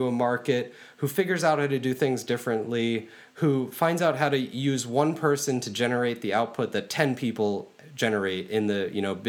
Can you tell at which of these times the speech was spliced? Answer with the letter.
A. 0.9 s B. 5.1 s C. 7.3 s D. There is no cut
D